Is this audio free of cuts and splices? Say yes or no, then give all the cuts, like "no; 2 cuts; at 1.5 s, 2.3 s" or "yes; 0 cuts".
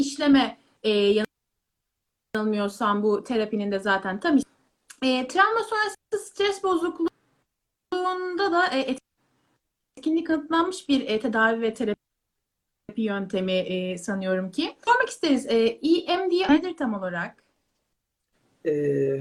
yes; 0 cuts